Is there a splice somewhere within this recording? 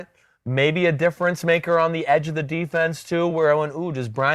no; 0 cuts

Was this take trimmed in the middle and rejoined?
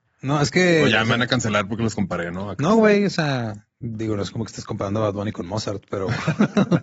no; 0 cuts

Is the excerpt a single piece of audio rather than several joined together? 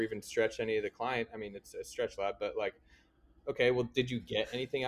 yes; 0 cuts

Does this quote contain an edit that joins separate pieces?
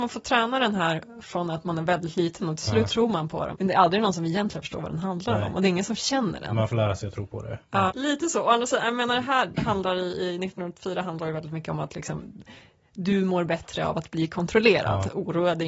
yes; 2 cuts; at 3.5 s, 7.9 s

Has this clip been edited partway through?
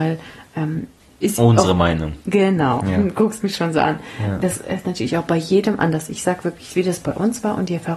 no; 0 cuts

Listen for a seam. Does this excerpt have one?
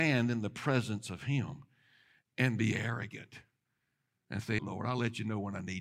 yes; 1 cut; at 4.6 s

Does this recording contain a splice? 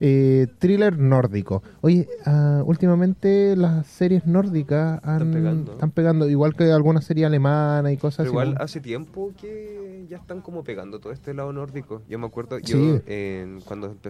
no; 0 cuts

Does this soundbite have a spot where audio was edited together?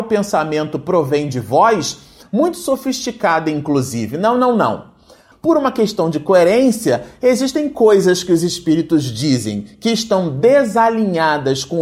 yes; 2 cuts; at 2.2 s, 5.3 s

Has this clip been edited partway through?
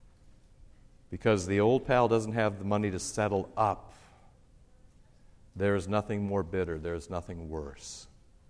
no; 0 cuts

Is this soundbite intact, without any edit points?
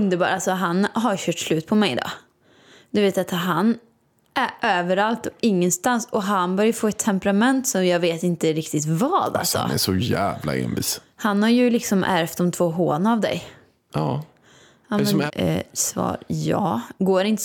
no; 2 cuts; at 13.9 s, 15.3 s

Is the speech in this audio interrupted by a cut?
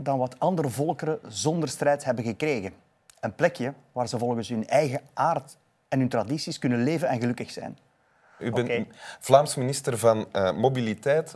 yes; 1 cut; at 8.4 s

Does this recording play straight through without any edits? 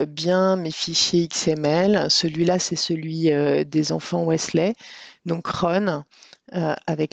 yes; 0 cuts

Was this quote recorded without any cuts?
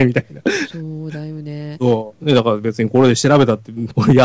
yes; 0 cuts

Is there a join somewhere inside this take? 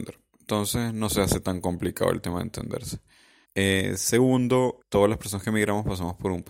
yes; 2 cuts; at 3.4 s, 4.8 s

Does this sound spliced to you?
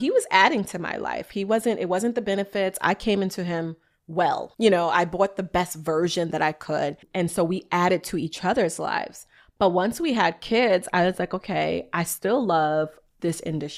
no; 0 cuts

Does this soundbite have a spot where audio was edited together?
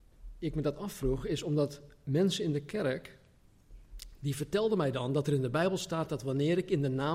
no; 0 cuts

